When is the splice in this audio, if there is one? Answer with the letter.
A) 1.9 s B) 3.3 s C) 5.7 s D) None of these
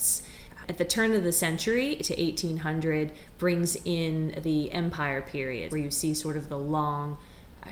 C